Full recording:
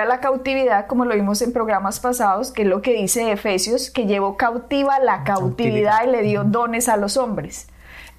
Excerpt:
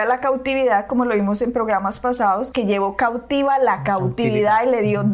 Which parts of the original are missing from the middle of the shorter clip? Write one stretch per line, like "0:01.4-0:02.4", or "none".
0:02.5-0:03.9